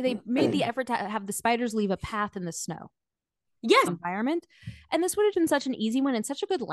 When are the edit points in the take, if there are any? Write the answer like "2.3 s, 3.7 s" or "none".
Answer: 3.9 s, 5.3 s